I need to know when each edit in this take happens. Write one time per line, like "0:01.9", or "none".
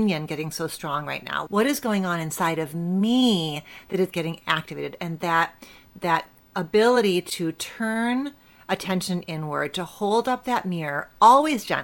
0:01.5